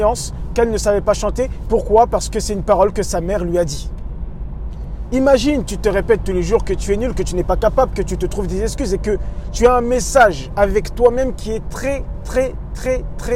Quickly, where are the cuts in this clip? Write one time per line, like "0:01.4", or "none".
0:05.1